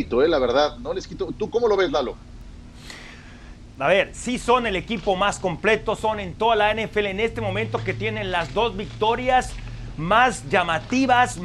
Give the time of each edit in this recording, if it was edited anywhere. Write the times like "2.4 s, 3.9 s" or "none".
3.8 s, 6.0 s